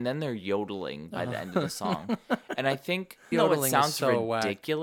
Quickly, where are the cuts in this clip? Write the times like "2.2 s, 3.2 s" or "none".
3.3 s